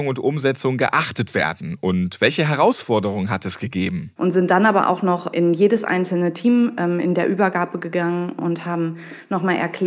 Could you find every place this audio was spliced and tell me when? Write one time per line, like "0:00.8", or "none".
0:04.2